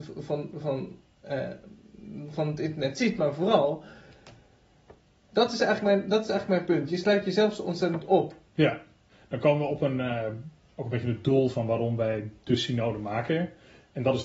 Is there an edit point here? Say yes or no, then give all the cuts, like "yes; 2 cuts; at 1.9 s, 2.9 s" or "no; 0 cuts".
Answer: yes; 1 cut; at 5.2 s